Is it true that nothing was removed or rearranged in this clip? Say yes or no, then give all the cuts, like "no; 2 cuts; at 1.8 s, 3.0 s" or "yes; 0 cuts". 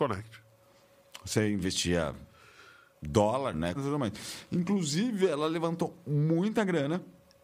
no; 1 cut; at 3.7 s